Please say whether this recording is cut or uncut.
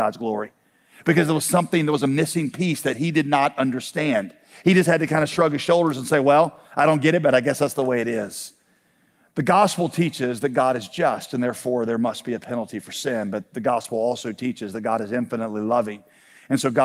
uncut